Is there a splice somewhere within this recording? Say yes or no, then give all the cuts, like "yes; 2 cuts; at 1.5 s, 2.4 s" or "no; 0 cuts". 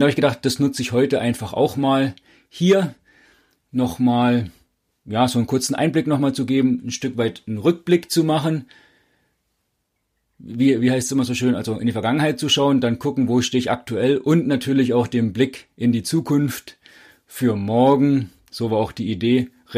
no; 0 cuts